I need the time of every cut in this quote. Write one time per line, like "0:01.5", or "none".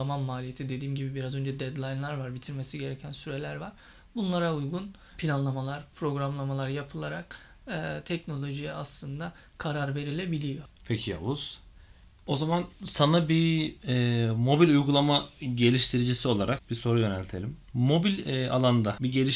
none